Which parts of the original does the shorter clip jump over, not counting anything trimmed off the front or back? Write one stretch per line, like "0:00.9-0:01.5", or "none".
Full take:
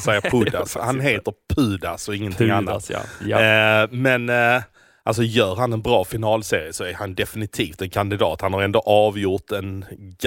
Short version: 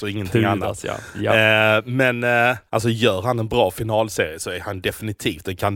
0:04.7-0:05.0